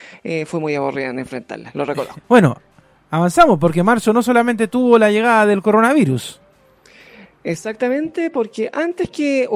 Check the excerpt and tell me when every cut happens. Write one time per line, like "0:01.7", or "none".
0:02.2